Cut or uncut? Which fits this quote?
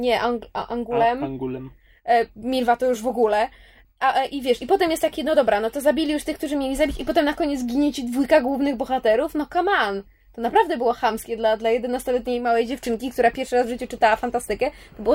uncut